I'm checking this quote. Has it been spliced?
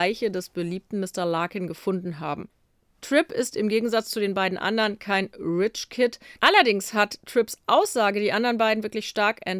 yes; 1 cut; at 6.4 s

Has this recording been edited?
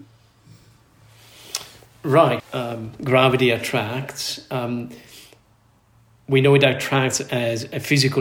yes; 1 cut; at 2.4 s

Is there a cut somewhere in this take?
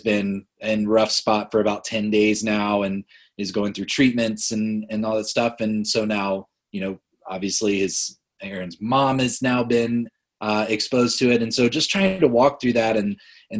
no; 0 cuts

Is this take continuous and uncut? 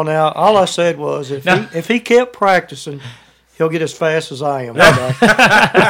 yes; 0 cuts

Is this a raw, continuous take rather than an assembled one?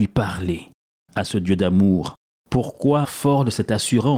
no; 1 cut; at 3.0 s

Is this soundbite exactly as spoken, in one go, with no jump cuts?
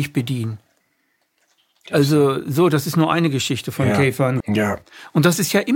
no; 1 cut; at 4.4 s

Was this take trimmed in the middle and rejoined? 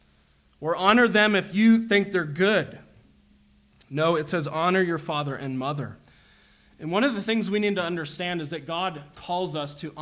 no; 0 cuts

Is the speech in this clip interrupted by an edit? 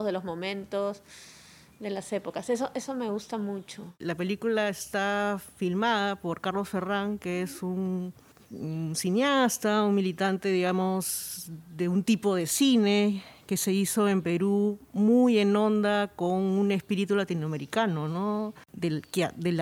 no; 0 cuts

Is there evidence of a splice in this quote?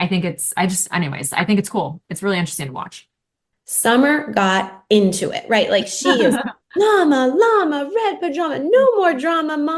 yes; 1 cut; at 3.5 s

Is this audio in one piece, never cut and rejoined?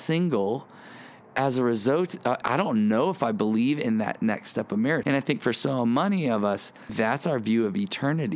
no; 3 cuts; at 2.4 s, 5.0 s, 6.9 s

